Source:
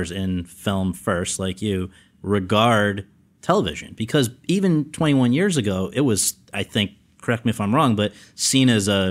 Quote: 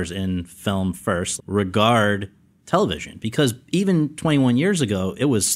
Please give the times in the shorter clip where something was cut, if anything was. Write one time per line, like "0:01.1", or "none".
0:01.4